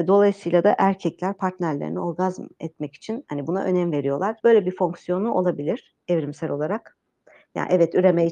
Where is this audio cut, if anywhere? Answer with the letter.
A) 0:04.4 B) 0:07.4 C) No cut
A